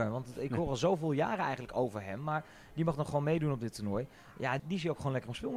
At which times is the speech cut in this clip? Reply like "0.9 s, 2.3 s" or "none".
4.6 s